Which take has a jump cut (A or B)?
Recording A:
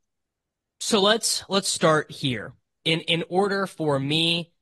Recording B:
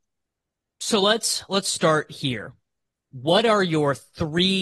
A